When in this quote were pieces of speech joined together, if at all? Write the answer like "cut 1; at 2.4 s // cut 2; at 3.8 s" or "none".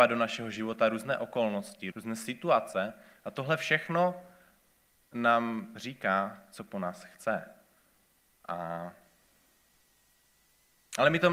cut 1; at 1.9 s